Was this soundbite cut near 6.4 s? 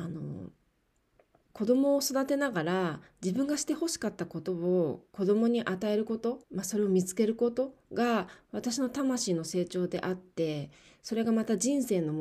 yes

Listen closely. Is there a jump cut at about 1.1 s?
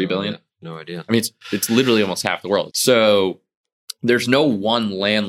no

